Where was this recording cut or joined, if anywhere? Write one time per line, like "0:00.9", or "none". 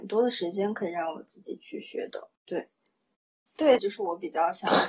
0:02.4
0:03.8